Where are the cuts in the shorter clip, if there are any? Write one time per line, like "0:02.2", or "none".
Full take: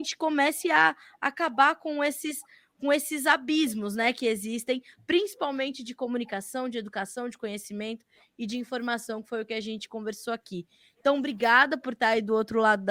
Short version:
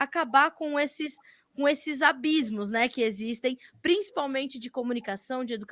none